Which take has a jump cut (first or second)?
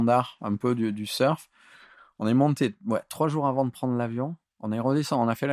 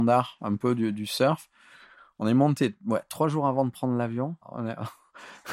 second